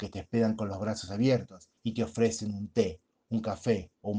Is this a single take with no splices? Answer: no; 1 cut; at 1.8 s

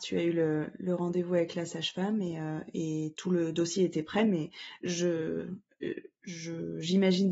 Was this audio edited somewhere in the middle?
no; 0 cuts

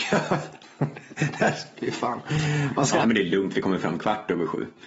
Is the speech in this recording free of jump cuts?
no; 1 cut; at 3.0 s

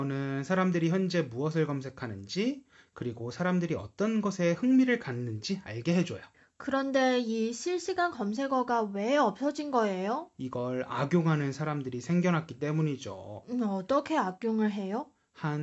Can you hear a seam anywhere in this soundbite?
no; 0 cuts

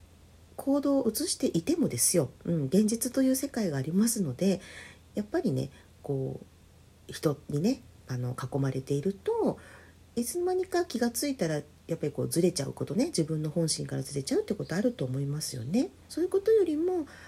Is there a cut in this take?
yes; 1 cut; at 16.0 s

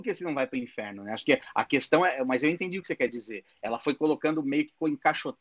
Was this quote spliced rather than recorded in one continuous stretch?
no; 0 cuts

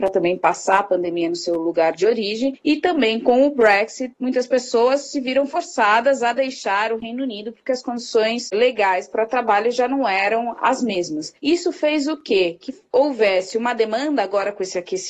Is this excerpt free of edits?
yes; 0 cuts

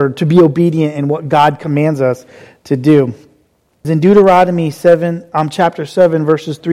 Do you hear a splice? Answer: yes; 1 cut; at 3.8 s

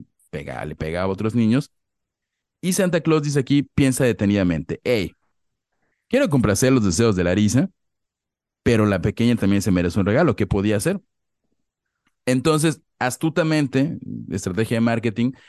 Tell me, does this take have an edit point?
no; 0 cuts

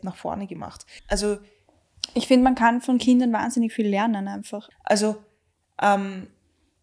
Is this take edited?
yes; 2 cuts; at 1.0 s, 4.7 s

